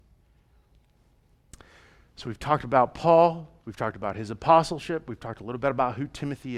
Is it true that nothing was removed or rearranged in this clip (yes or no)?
yes